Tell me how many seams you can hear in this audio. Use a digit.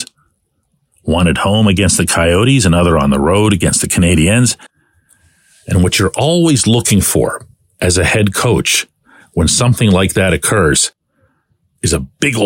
0